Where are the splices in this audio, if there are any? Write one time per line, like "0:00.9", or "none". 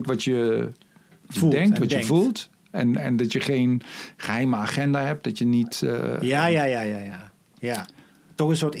none